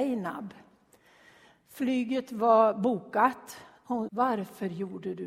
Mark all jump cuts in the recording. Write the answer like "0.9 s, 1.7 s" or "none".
4.1 s

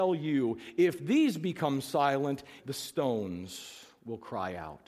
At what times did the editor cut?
2.6 s

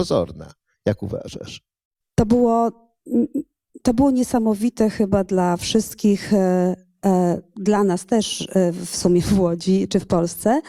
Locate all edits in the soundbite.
2.0 s

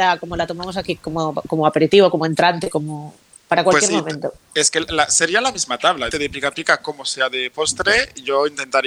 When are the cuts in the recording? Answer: 6.1 s

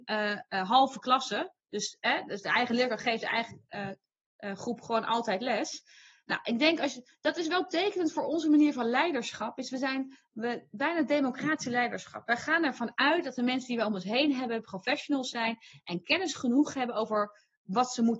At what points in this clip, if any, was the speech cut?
none

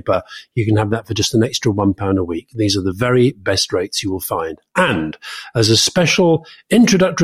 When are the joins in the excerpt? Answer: none

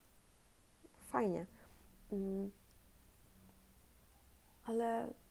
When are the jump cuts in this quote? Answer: 1.0 s

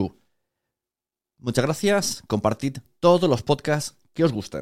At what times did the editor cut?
none

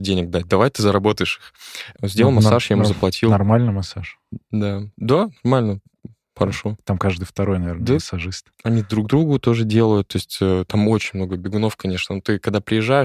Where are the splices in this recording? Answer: 2.0 s

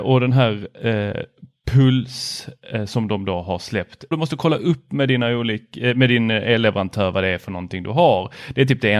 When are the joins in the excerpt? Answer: 4.1 s

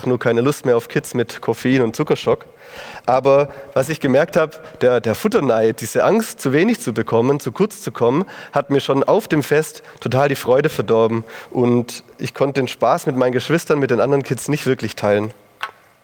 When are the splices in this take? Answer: none

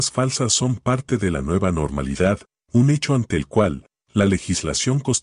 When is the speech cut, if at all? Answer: none

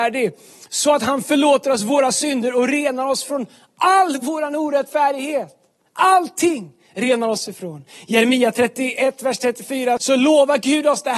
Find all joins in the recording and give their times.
10.0 s

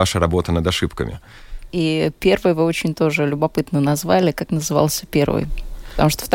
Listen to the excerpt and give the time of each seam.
1.7 s

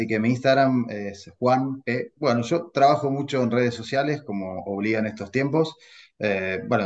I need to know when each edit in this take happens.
2.2 s

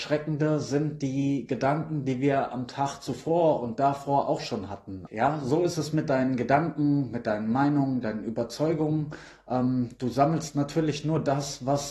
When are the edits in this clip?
5.1 s

